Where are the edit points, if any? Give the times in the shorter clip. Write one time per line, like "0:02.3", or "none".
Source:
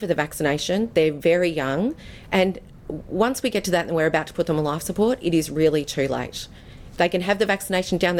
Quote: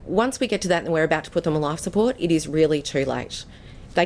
none